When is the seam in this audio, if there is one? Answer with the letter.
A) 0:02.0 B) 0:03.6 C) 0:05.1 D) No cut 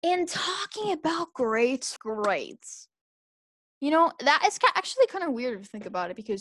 A